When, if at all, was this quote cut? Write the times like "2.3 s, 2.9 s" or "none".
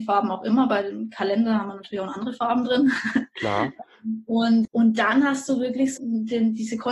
4.7 s, 6.0 s

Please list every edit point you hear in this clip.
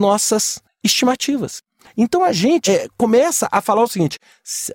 2.7 s

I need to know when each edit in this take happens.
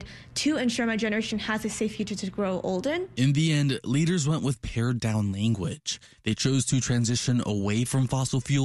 none

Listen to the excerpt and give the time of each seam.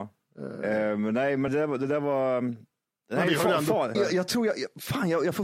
1.5 s, 3.9 s

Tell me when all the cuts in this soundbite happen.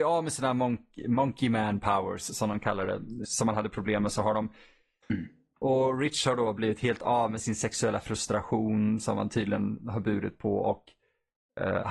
3.2 s, 5.0 s

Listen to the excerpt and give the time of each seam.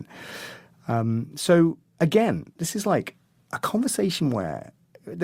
none

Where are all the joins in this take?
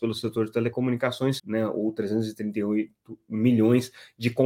1.4 s

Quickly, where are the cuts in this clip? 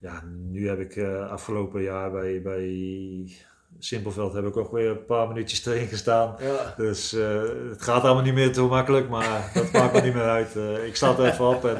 none

